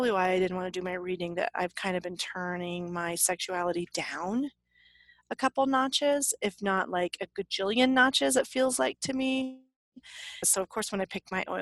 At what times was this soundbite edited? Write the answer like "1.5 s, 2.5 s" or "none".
10.4 s